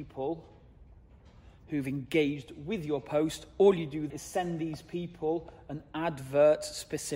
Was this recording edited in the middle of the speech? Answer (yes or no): yes